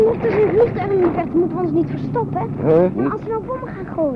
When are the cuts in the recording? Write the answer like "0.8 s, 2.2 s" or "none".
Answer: 3.0 s